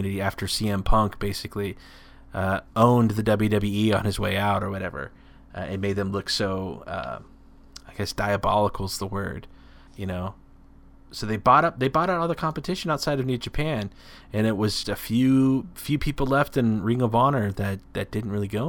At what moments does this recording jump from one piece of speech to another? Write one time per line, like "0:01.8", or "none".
0:09.9
0:14.8